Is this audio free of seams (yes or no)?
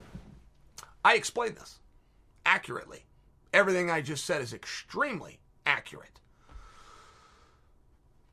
yes